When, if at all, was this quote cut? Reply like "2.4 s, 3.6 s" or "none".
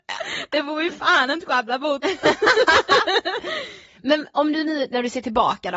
none